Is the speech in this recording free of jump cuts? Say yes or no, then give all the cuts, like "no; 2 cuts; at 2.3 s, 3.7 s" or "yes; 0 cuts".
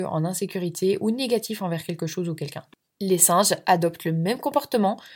yes; 0 cuts